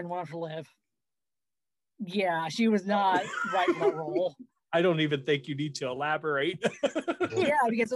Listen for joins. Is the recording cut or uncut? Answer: uncut